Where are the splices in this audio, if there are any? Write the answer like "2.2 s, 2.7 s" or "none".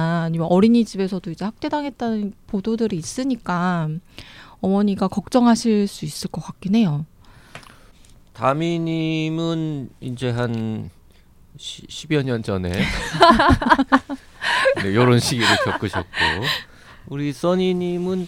none